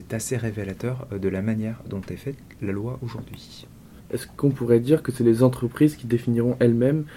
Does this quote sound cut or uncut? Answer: cut